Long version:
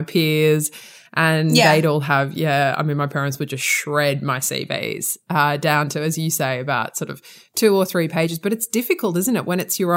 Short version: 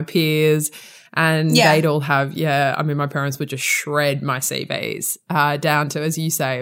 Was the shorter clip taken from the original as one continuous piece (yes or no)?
yes